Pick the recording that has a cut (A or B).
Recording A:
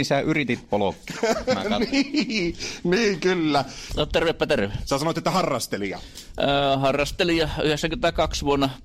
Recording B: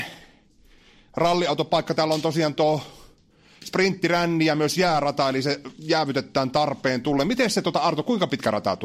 A